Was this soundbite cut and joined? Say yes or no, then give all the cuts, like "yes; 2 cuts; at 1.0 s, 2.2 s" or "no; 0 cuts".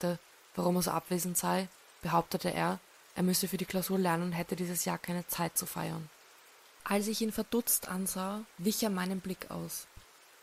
no; 0 cuts